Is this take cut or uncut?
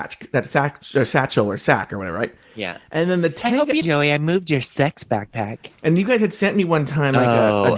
cut